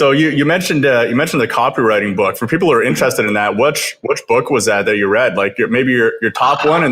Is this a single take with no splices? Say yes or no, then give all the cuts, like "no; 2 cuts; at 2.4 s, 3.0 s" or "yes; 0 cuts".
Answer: yes; 0 cuts